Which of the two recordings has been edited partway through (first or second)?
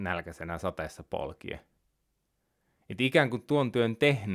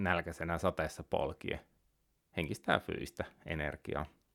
second